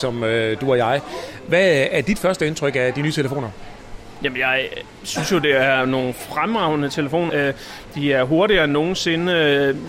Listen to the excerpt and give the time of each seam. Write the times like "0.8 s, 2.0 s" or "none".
7.3 s